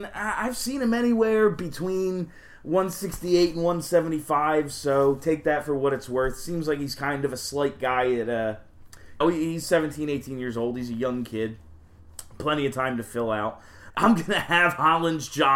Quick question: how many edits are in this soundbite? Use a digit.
2